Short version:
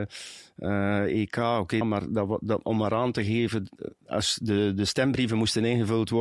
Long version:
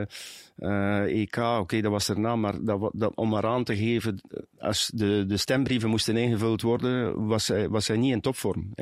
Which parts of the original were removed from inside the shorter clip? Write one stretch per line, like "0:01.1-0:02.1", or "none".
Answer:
0:01.8-0:02.3